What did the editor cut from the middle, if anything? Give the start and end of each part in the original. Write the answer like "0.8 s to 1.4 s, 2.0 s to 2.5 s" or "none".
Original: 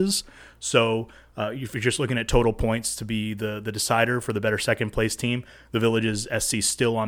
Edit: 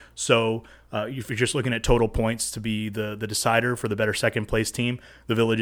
none